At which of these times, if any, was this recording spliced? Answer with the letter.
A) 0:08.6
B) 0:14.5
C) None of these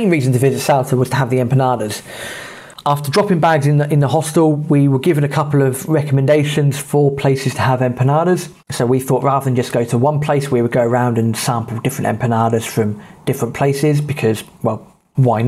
A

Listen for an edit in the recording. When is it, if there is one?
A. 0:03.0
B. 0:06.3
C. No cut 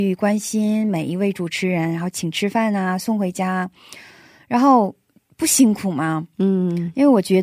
C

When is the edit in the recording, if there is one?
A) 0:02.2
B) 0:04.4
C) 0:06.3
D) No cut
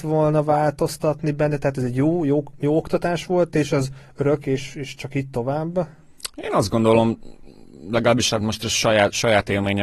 D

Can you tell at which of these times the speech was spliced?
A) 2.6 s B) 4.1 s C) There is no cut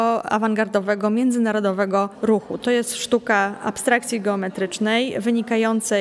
A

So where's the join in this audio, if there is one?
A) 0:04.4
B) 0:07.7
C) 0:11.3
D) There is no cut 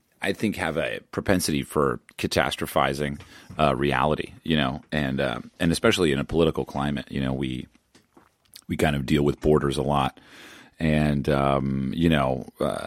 D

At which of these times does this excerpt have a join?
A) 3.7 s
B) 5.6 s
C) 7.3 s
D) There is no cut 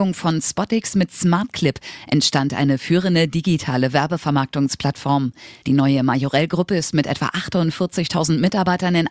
B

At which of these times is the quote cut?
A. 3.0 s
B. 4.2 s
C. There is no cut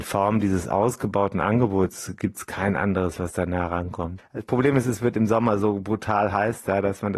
B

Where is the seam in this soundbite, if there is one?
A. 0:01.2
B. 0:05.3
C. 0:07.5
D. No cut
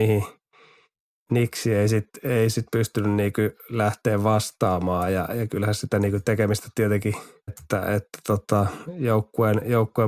C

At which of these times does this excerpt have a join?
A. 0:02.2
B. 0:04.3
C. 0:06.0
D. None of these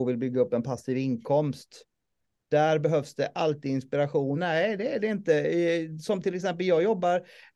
B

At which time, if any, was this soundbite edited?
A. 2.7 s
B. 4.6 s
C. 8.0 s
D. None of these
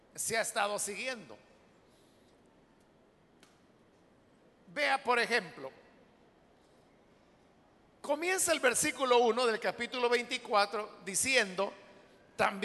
D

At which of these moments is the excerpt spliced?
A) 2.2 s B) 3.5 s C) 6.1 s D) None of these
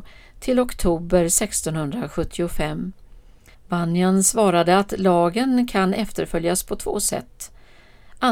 B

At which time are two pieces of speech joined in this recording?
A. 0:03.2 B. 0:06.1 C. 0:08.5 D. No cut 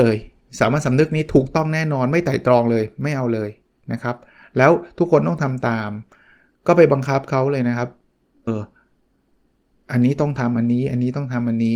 C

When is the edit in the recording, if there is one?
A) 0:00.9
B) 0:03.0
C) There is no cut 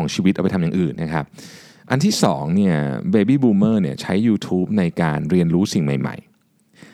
A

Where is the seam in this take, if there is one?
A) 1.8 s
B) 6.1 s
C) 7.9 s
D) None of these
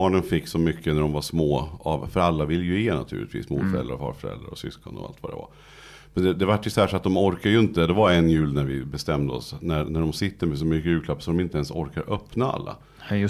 D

